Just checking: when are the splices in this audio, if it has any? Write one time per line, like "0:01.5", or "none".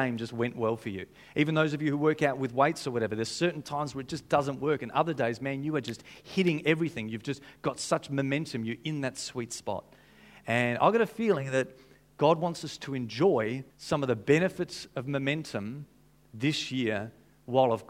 0:13.7